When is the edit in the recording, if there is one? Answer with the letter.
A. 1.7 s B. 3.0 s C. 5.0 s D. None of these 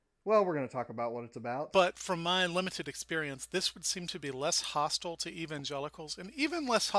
A